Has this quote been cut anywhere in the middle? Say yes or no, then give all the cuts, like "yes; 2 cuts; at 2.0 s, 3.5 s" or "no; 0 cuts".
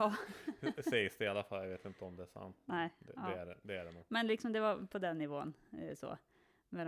no; 0 cuts